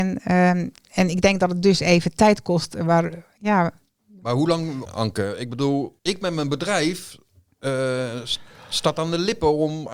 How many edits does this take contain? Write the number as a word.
two